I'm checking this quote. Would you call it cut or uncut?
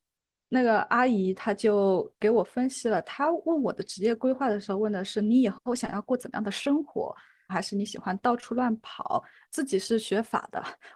cut